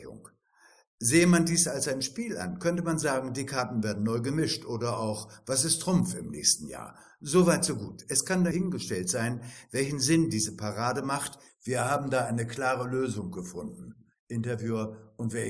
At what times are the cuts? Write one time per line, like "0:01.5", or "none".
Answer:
0:11.5